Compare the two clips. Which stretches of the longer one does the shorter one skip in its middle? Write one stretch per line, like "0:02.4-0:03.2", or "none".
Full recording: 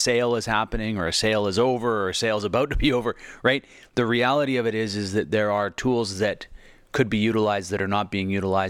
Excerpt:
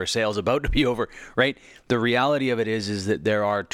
none